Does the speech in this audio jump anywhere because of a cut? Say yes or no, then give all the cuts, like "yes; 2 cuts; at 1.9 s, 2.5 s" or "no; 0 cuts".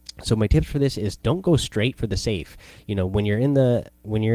no; 0 cuts